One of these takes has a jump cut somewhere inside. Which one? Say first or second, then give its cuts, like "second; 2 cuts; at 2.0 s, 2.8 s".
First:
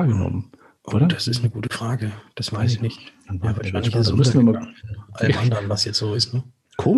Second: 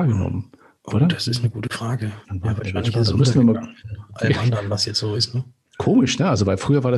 second; 1 cut; at 2.2 s